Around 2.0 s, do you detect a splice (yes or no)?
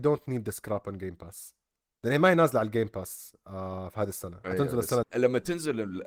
no